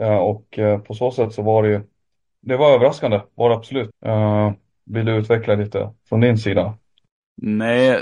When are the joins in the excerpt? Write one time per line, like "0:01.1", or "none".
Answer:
0:03.9